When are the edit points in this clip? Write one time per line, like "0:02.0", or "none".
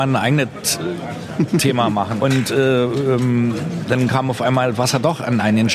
0:02.2